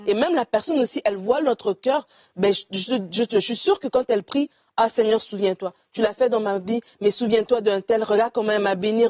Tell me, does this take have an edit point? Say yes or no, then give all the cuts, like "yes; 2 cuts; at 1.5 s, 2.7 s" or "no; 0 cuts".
no; 0 cuts